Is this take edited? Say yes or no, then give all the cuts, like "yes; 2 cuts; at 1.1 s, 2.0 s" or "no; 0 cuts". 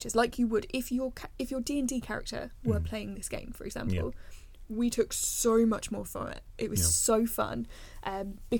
no; 0 cuts